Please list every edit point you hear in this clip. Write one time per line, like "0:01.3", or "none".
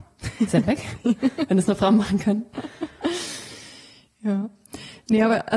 none